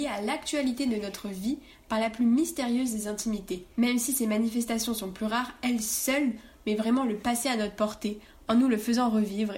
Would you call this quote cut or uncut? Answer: cut